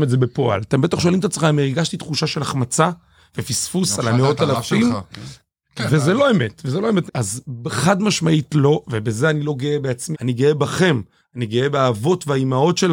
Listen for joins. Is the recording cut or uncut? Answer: cut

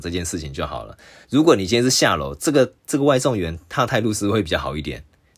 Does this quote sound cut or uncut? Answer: uncut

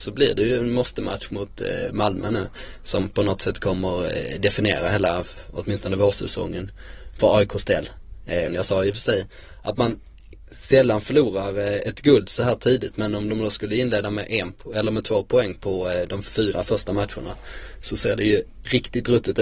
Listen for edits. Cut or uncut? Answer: cut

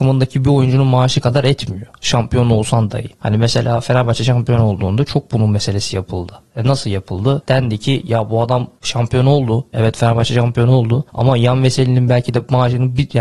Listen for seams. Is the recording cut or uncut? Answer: uncut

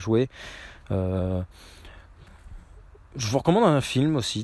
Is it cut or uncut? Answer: uncut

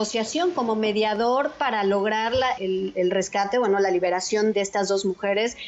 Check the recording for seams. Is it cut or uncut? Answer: cut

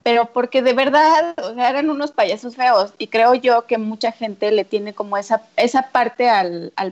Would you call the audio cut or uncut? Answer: cut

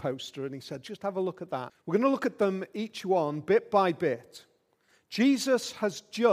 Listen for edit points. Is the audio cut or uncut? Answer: cut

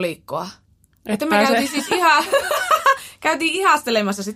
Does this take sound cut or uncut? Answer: uncut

